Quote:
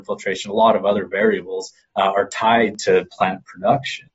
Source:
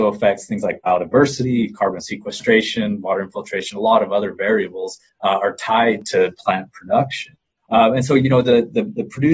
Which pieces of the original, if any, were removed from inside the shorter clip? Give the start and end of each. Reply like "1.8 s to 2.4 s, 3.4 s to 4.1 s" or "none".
none